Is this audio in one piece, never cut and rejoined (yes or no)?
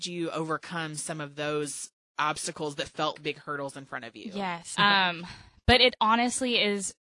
no